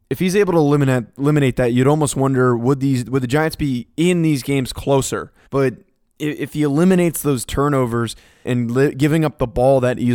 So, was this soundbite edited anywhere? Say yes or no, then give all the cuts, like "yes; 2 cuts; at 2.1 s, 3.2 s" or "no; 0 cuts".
yes; 2 cuts; at 5.4 s, 8.4 s